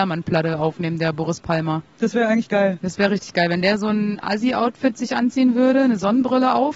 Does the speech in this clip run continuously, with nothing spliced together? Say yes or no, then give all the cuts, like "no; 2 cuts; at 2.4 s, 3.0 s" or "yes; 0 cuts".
yes; 0 cuts